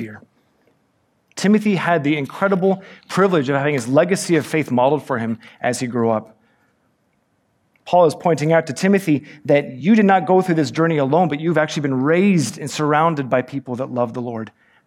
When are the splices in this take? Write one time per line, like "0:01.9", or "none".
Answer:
0:01.3